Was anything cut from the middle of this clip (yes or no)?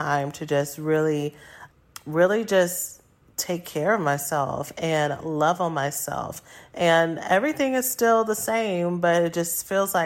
no